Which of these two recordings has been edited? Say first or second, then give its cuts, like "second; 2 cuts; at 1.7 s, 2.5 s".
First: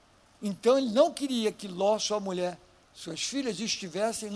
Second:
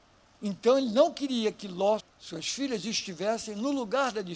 second; 1 cut; at 2.0 s